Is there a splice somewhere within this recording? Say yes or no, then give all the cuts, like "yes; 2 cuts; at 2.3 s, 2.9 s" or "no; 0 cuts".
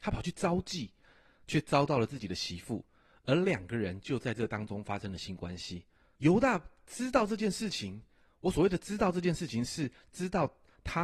yes; 1 cut; at 6.2 s